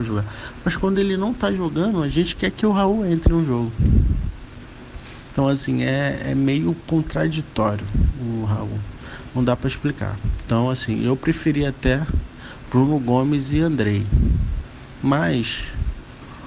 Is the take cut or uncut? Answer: uncut